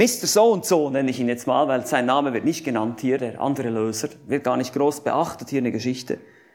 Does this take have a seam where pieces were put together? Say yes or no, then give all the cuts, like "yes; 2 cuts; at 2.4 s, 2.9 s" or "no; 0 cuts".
no; 0 cuts